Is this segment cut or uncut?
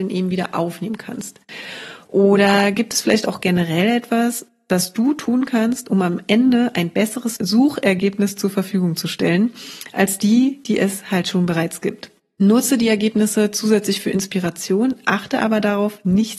uncut